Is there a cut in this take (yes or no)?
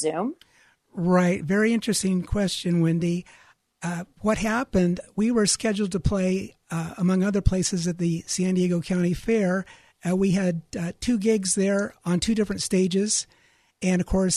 no